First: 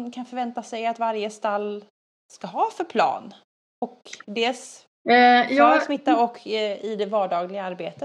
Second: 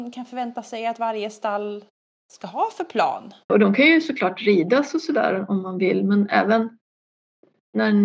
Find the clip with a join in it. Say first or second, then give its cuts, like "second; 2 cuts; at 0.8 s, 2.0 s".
second; 1 cut; at 3.5 s